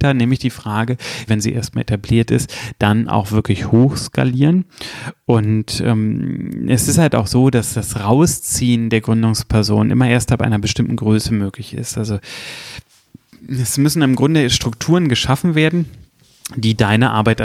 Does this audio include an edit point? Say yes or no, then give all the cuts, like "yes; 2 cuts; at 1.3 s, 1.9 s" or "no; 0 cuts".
yes; 1 cut; at 1.3 s